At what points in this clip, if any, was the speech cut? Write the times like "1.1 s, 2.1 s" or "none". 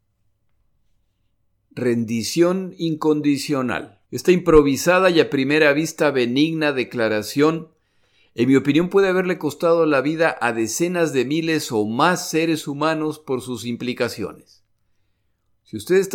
4.0 s